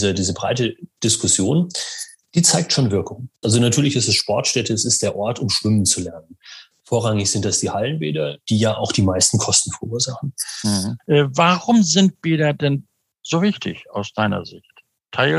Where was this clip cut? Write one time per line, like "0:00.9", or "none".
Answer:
0:03.4
0:11.0